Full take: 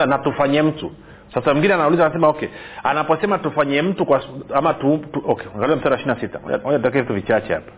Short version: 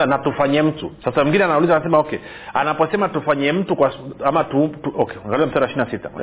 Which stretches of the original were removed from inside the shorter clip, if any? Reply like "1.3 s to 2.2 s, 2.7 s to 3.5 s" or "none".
1.0 s to 1.3 s